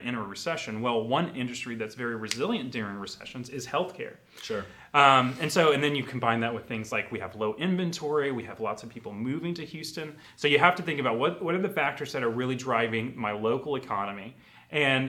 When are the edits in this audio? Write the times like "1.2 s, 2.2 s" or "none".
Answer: none